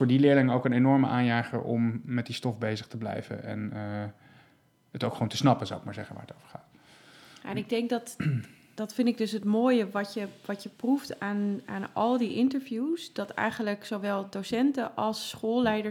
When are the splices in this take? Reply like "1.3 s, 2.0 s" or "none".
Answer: none